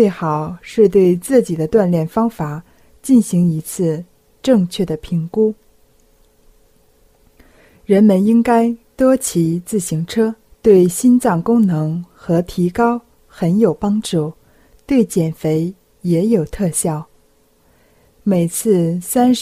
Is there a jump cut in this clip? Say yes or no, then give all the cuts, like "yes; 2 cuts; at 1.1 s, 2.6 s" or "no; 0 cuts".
yes; 2 cuts; at 10.5 s, 18.2 s